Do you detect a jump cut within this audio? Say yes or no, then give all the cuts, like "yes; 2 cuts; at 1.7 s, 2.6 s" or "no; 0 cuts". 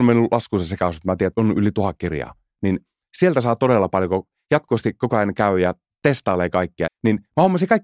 yes; 2 cuts; at 1.3 s, 6.9 s